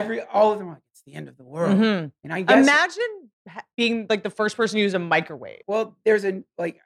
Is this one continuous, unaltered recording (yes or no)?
no